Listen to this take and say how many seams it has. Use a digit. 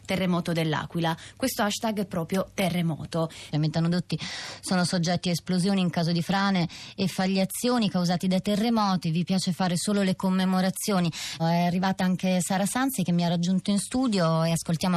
2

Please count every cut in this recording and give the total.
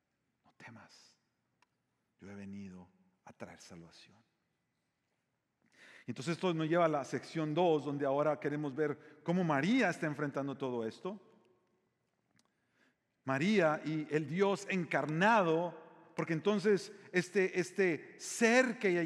0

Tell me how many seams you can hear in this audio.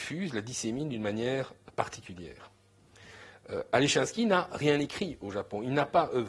0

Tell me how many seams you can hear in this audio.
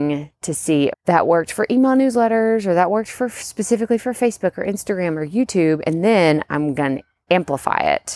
1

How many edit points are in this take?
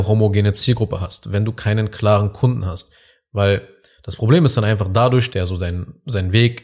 1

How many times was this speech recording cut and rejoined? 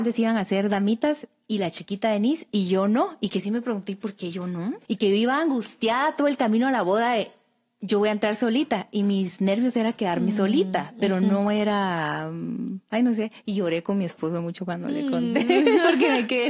1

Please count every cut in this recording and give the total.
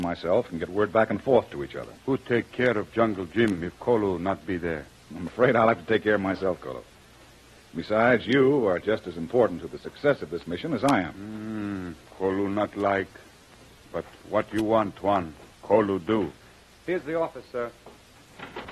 1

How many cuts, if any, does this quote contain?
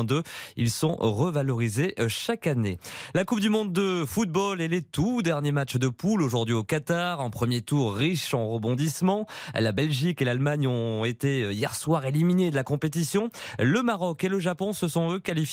0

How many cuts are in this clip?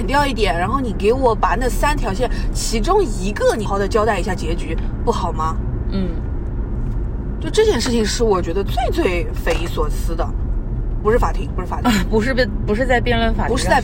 2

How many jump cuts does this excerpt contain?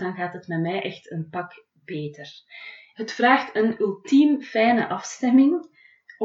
1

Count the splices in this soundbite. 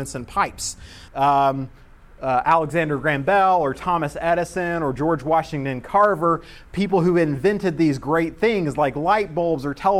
1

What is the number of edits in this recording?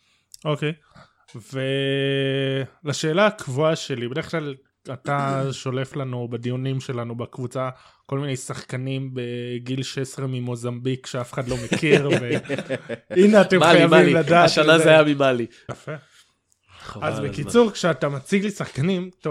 1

